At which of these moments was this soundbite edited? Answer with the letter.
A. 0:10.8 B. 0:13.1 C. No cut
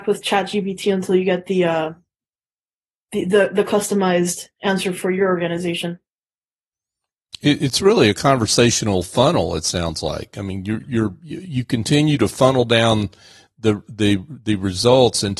A